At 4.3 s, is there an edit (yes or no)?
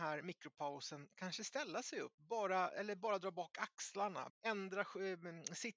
yes